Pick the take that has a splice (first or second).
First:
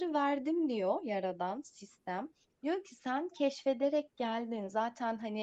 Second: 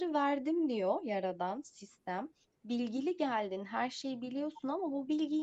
first